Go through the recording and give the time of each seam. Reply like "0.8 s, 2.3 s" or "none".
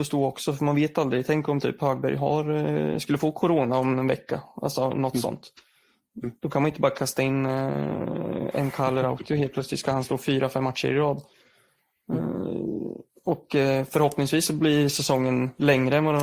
none